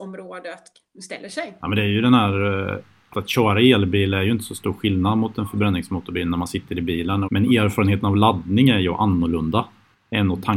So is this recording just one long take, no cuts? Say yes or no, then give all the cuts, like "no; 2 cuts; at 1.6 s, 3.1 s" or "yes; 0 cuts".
no; 2 cuts; at 3.1 s, 7.2 s